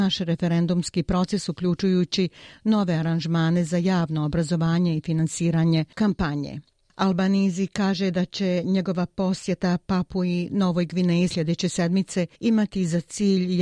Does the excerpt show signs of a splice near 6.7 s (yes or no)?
no